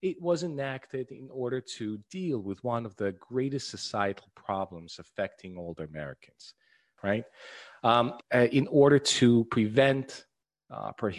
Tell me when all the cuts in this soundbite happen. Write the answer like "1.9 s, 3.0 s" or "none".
7.0 s, 8.2 s